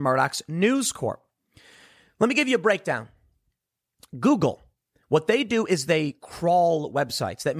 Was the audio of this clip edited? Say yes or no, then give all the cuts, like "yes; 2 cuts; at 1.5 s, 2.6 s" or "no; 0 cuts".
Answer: no; 0 cuts